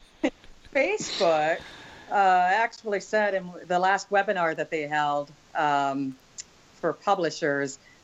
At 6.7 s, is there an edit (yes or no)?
no